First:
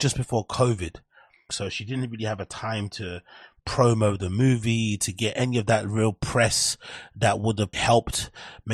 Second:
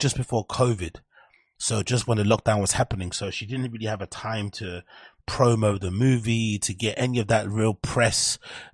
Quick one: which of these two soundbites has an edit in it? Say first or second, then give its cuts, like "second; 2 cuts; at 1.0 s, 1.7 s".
first; 2 cuts; at 1.5 s, 7.7 s